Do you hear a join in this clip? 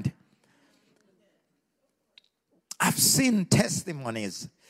no; 0 cuts

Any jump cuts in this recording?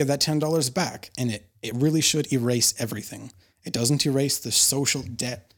no; 0 cuts

